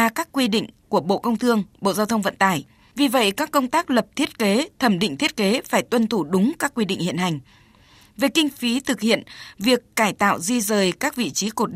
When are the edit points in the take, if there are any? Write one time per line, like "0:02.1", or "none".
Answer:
none